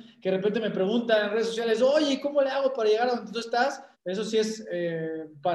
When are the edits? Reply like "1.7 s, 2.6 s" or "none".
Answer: 3.9 s